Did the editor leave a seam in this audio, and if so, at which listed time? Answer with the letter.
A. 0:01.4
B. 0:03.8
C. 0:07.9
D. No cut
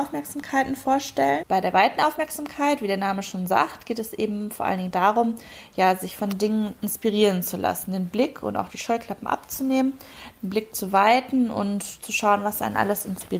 A